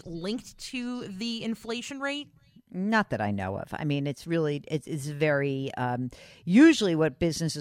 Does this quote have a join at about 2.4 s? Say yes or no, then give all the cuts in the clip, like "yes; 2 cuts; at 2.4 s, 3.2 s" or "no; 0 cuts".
no; 0 cuts